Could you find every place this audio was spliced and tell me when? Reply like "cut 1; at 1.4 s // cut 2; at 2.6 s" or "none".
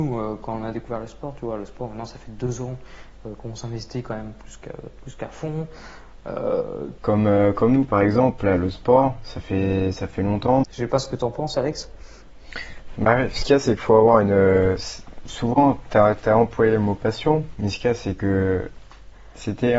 cut 1; at 7.0 s // cut 2; at 10.6 s